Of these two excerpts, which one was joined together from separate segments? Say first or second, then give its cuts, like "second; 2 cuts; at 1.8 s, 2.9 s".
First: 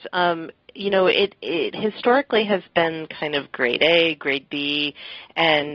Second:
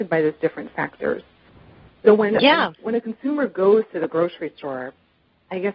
second; 1 cut; at 2.8 s